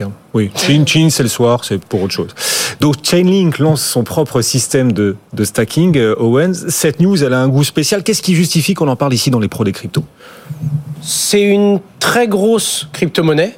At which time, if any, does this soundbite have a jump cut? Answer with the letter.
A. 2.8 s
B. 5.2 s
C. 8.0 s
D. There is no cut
D